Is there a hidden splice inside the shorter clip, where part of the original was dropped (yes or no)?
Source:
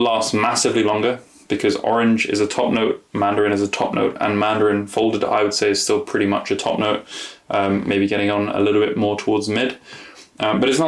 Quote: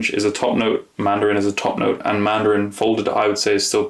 no